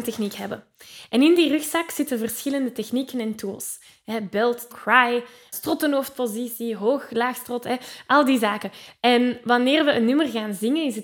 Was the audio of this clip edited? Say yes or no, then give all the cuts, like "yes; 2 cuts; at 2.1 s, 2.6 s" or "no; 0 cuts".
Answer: yes; 1 cut; at 4.7 s